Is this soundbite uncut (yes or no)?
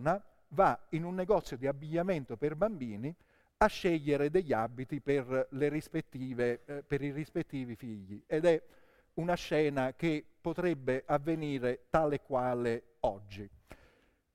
yes